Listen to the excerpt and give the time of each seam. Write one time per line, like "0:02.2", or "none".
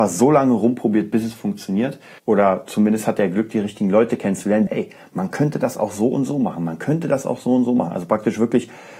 0:02.2
0:04.7